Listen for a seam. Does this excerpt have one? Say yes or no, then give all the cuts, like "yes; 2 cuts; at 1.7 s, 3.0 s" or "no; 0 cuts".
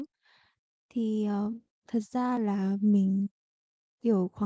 yes; 1 cut; at 1.8 s